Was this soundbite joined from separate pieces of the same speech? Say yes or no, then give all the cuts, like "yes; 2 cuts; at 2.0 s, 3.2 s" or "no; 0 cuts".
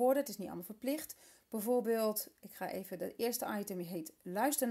no; 0 cuts